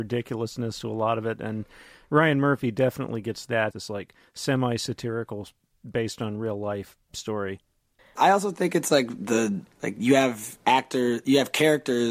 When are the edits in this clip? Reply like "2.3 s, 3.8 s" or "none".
3.7 s, 8.0 s, 9.7 s